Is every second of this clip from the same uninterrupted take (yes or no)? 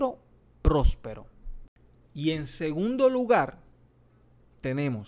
no